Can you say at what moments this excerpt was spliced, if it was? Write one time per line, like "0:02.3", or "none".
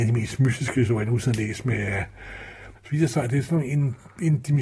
0:02.7